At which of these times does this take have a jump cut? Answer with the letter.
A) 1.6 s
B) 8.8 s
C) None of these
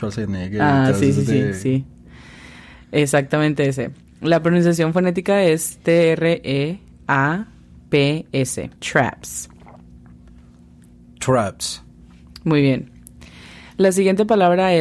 B